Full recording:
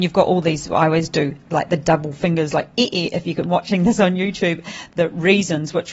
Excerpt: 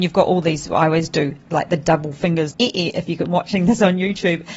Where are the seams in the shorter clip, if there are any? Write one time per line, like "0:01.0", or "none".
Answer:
0:02.5